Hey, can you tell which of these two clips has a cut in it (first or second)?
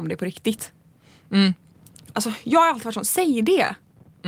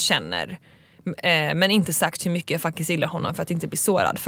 first